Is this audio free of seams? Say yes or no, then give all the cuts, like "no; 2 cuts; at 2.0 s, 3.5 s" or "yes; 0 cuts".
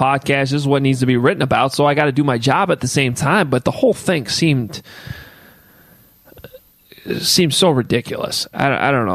yes; 0 cuts